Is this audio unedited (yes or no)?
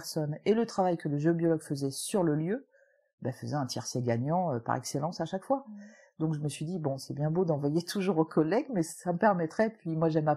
yes